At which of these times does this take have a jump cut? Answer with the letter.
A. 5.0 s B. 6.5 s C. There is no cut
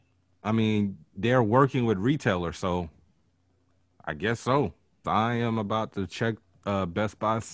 A